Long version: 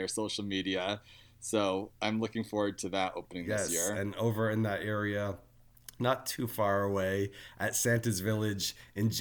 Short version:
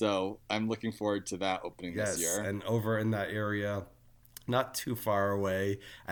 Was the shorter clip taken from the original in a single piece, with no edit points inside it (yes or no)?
yes